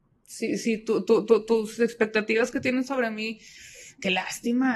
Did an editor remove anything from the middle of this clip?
no; 0 cuts

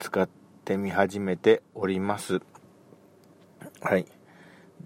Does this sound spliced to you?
no; 0 cuts

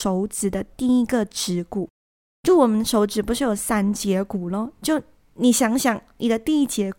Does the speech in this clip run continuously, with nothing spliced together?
yes; 0 cuts

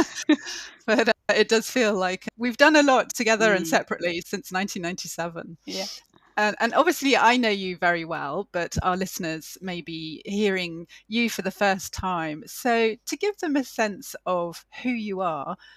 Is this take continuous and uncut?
yes; 0 cuts

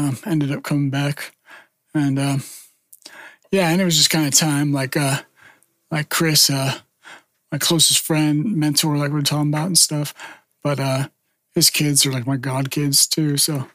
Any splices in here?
no; 0 cuts

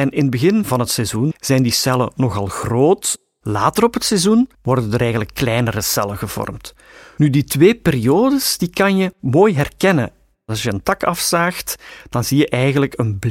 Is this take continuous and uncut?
no; 2 cuts; at 1.3 s, 4.5 s

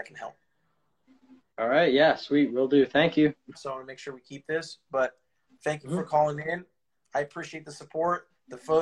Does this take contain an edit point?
yes; 1 cut; at 3.5 s

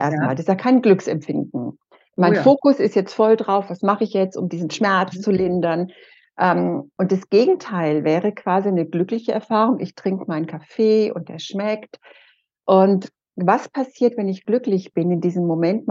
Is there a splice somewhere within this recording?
no; 0 cuts

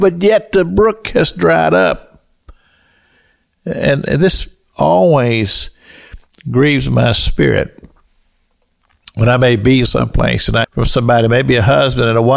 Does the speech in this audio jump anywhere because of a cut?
yes; 1 cut; at 10.6 s

